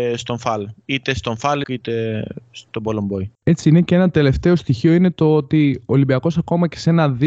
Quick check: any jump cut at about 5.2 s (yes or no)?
no